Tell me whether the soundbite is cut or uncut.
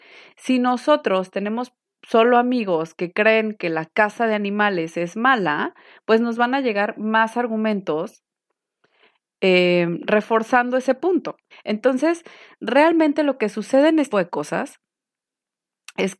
cut